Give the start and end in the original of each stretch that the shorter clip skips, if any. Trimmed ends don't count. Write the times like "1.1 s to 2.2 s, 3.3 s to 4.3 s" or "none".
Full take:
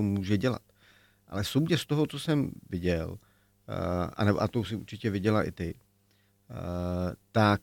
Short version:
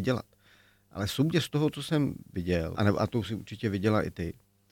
3.1 s to 4.1 s